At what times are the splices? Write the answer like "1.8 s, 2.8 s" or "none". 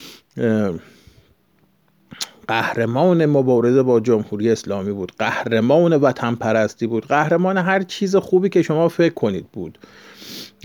none